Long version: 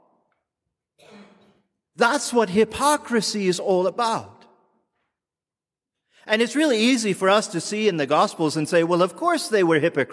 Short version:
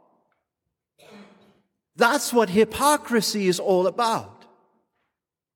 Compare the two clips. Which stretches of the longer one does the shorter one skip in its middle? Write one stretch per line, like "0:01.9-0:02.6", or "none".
none